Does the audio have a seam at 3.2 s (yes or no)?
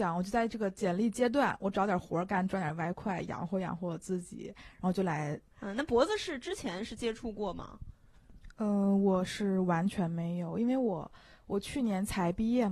no